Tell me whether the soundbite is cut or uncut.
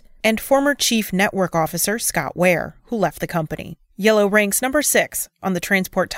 uncut